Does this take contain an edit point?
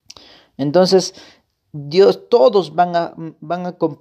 no; 0 cuts

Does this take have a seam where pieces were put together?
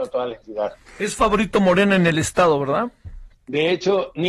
yes; 1 cut; at 3.3 s

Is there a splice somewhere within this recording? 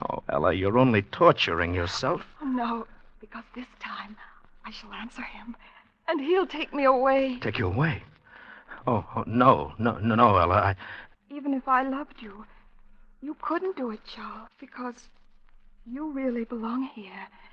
yes; 2 cuts; at 11.1 s, 14.5 s

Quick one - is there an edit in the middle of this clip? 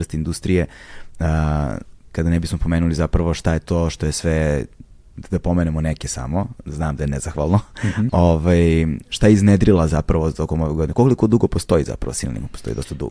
yes; 1 cut; at 8.1 s

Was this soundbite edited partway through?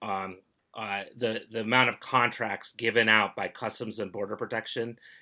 no; 0 cuts

